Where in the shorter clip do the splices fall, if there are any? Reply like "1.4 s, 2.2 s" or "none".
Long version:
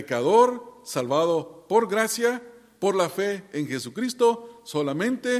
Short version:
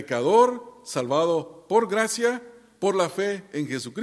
none